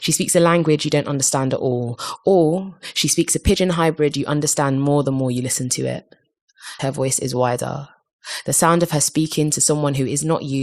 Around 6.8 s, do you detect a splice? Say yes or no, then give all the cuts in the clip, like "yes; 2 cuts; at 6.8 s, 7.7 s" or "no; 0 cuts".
yes; 1 cut; at 6.8 s